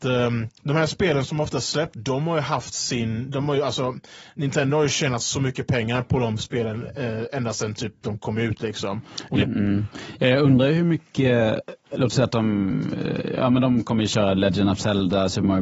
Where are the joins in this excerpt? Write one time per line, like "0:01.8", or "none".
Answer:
0:01.9
0:09.4
0:11.8